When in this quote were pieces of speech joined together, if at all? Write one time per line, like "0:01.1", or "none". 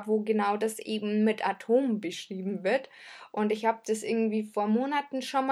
none